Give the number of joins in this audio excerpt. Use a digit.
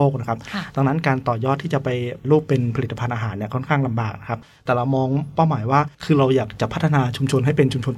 2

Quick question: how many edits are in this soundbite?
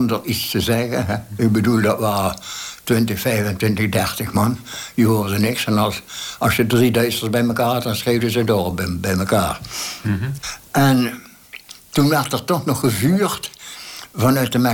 0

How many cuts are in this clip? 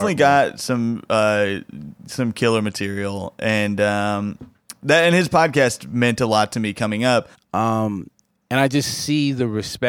1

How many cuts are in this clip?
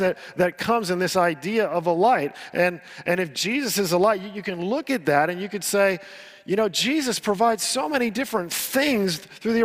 0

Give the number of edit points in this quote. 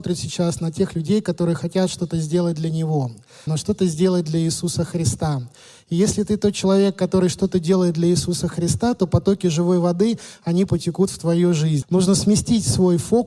2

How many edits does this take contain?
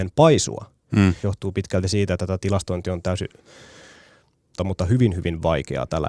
2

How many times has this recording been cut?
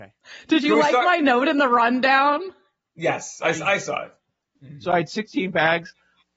1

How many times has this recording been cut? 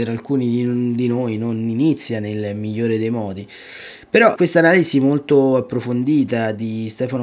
1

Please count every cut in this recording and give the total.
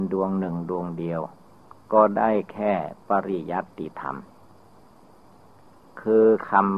1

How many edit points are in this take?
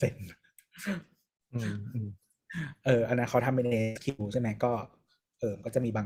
0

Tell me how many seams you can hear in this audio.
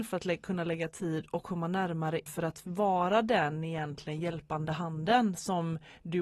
1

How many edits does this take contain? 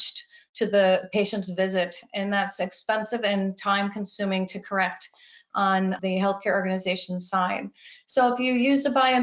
0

